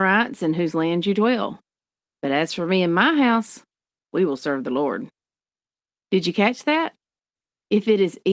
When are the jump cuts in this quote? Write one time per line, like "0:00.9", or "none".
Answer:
none